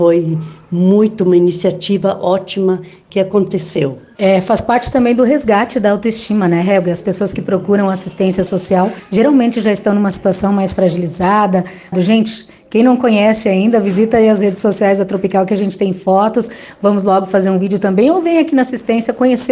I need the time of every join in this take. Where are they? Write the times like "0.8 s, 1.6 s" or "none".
11.9 s